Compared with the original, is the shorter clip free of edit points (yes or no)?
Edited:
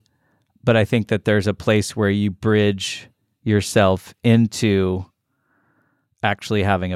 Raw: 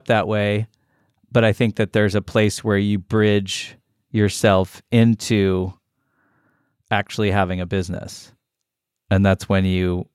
yes